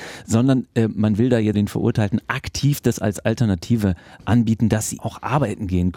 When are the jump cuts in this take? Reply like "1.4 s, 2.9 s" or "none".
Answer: 1.5 s, 5.0 s